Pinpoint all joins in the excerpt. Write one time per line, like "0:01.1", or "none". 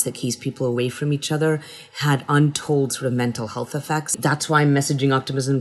none